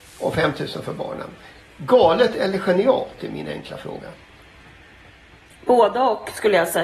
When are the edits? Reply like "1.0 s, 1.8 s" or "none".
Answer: none